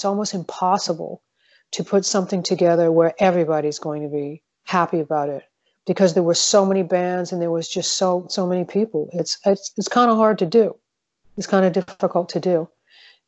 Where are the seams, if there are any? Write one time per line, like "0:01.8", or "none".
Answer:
none